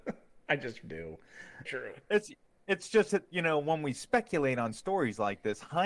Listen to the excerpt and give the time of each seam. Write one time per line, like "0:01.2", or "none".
0:01.7